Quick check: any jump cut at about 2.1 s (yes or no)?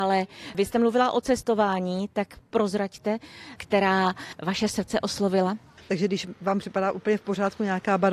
no